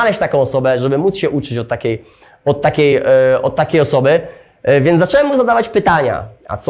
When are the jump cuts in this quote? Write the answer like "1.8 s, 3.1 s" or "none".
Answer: none